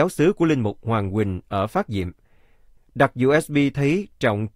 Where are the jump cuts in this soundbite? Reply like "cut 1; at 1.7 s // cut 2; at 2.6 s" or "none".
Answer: cut 1; at 2.8 s